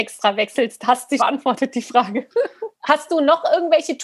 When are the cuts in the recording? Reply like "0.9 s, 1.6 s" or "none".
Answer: 1.2 s, 2.7 s

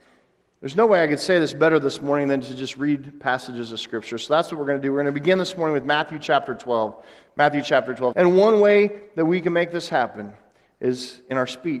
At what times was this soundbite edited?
8.1 s

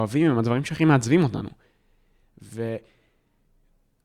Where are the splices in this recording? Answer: none

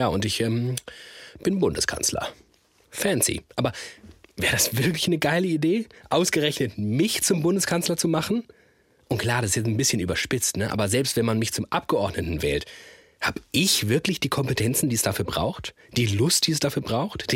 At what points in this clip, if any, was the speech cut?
none

